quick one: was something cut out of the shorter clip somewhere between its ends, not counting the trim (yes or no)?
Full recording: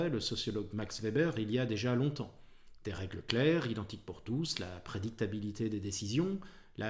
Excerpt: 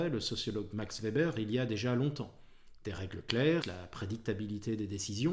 yes